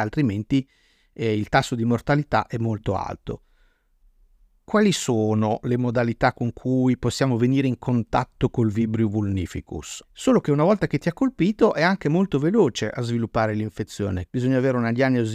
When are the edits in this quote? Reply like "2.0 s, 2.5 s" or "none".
10.0 s, 14.3 s